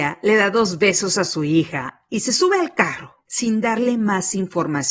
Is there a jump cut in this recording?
yes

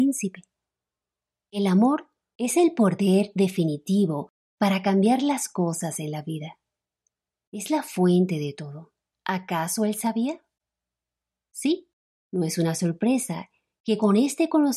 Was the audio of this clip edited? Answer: yes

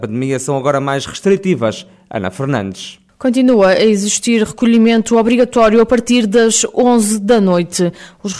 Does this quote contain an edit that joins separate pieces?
no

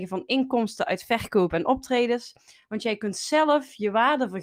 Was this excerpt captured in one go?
yes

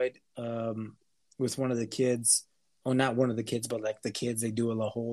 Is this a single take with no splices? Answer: yes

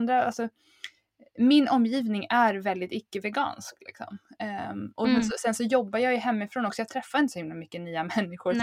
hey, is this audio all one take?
yes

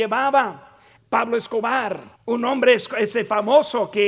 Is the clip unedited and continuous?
no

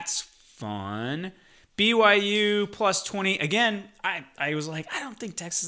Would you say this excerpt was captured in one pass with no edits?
yes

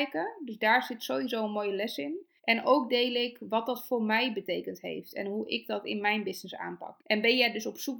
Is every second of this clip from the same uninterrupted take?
no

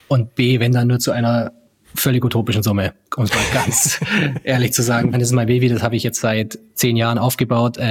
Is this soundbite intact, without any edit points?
no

